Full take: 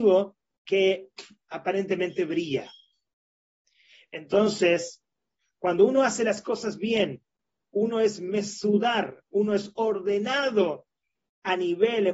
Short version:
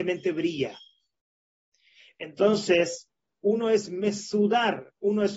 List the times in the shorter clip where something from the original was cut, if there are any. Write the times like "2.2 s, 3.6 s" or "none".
3.2 s